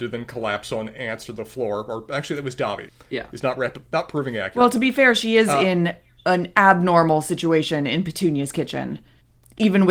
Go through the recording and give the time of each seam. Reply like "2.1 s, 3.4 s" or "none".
2.9 s